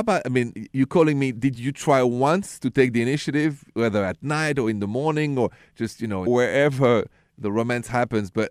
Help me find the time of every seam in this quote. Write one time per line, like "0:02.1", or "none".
0:06.3